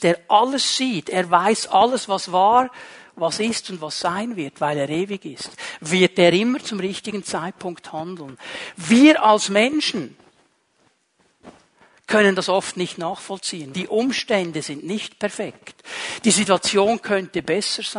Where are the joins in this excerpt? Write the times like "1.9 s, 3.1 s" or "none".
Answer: 13.7 s